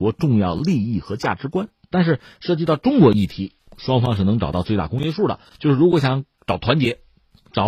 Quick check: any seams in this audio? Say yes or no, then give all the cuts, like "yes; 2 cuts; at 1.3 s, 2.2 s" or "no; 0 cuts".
yes; 1 cut; at 1.9 s